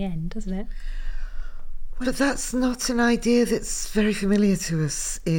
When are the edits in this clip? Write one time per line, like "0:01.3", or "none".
0:02.0